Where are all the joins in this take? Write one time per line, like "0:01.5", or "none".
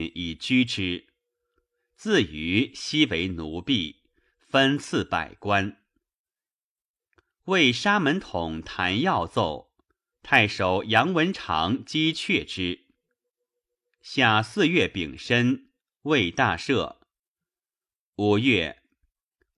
0:10.1